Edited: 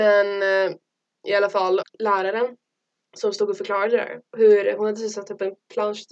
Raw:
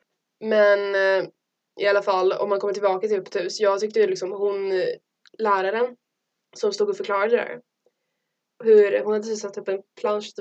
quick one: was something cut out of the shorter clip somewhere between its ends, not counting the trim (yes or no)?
yes